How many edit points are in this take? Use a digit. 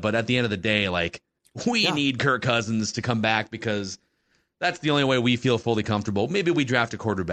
0